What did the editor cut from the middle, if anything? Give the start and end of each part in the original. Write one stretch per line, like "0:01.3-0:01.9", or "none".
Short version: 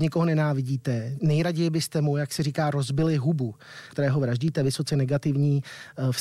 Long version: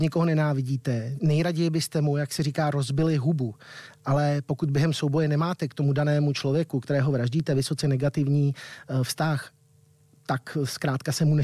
0:03.9-0:06.8